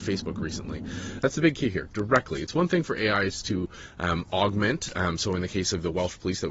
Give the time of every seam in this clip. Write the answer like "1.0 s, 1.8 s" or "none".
1.2 s